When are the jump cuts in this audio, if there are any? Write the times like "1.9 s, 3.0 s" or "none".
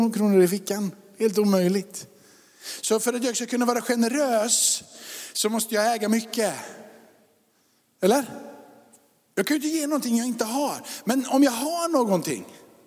none